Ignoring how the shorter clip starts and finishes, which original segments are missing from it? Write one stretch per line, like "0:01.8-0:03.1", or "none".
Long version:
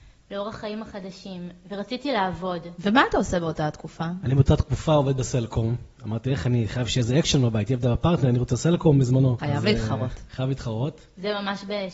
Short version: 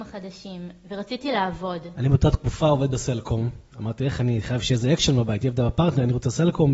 0:02.8-0:04.2